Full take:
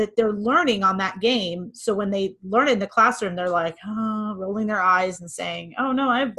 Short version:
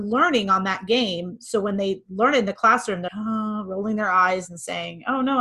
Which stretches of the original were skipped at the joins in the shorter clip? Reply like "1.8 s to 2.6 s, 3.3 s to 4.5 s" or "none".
3.4 s to 3.8 s